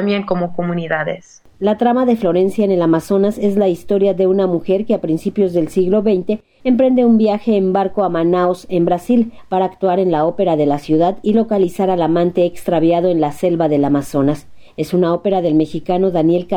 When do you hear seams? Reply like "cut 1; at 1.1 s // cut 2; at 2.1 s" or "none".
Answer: none